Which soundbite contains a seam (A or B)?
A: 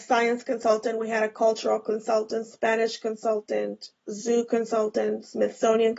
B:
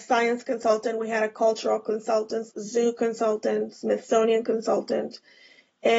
B